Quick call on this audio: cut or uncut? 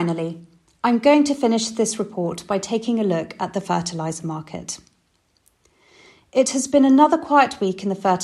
uncut